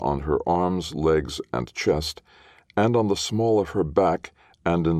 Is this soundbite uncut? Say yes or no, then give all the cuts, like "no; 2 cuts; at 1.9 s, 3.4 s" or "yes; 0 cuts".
yes; 0 cuts